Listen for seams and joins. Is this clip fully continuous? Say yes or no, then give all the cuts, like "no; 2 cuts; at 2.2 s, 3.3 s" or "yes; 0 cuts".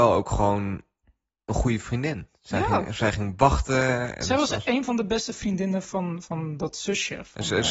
yes; 0 cuts